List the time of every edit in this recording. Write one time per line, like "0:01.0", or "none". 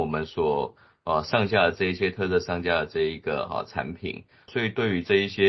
0:04.5